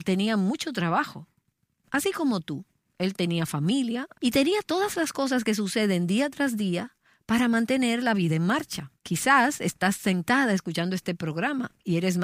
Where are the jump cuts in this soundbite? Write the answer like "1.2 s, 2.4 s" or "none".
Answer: 4.1 s, 9.0 s